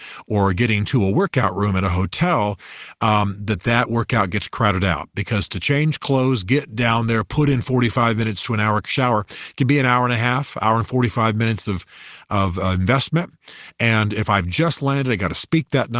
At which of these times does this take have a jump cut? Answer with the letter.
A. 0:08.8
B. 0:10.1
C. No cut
A